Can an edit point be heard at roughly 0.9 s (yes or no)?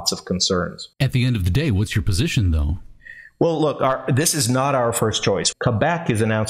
yes